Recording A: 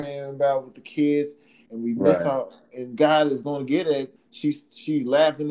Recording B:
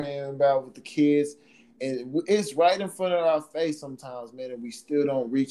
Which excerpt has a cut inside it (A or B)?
A